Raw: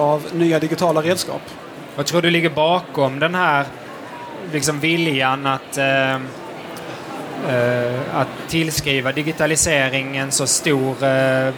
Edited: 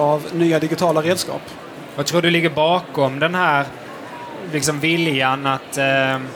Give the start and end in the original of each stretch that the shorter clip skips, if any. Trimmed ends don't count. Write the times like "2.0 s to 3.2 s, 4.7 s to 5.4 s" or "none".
none

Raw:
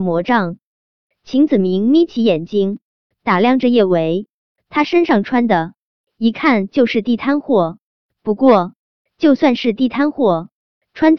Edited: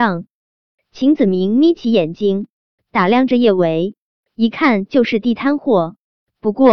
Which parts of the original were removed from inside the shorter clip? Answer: 4.6 s to 6.1 s

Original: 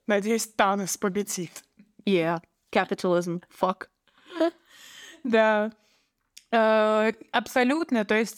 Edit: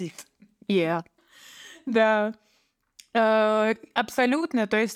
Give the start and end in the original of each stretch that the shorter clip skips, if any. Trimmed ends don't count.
2.6 s to 4.6 s

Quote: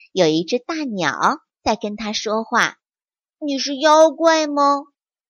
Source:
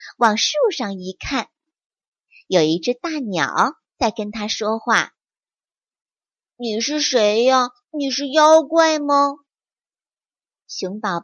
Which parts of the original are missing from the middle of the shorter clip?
5.7 s to 7.9 s

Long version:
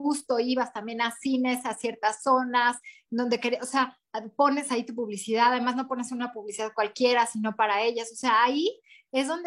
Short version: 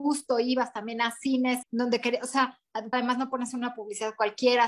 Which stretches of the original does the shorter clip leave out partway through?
1.6 s to 3.0 s, 4.3 s to 5.5 s

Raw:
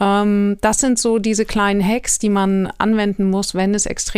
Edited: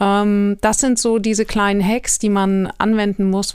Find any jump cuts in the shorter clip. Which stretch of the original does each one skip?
none

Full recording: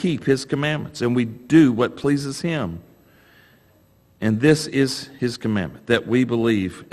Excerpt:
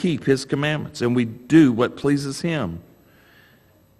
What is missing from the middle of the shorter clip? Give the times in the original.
none

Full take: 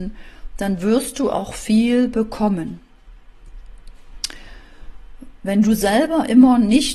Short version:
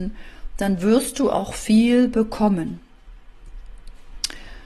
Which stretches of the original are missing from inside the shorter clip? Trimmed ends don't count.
none

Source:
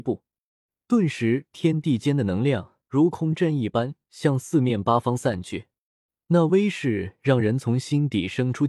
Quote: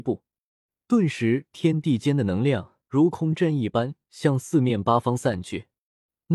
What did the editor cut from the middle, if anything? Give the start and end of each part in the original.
none

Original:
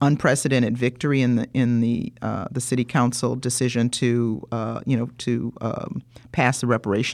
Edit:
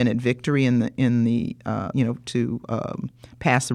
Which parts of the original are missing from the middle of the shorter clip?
2.5 s to 4.8 s

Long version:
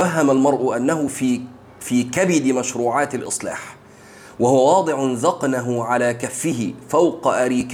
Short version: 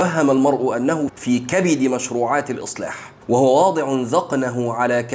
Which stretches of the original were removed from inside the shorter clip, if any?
1.1 s to 1.7 s, 3.9 s to 4.3 s

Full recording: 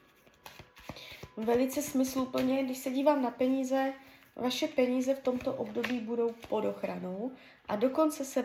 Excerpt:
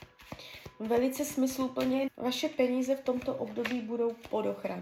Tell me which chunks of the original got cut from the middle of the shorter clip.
2.6 s to 4.3 s

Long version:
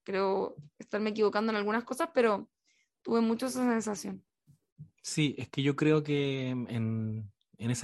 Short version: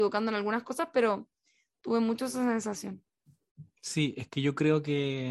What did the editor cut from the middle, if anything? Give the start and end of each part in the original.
none

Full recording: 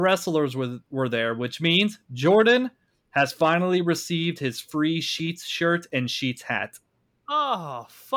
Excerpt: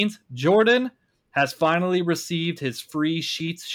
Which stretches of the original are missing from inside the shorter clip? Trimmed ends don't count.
none

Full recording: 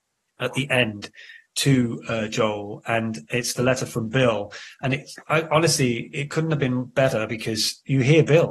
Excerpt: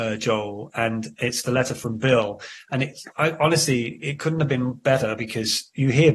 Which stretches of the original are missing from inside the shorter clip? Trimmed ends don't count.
none

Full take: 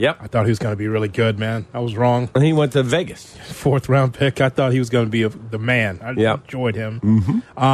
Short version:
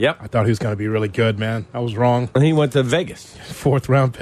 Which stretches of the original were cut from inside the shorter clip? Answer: none

